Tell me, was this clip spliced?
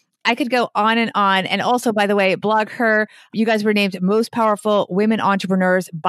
no; 0 cuts

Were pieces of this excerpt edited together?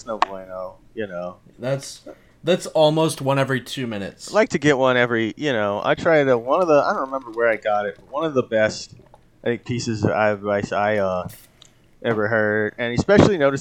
no; 0 cuts

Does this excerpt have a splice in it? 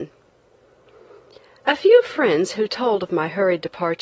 no; 0 cuts

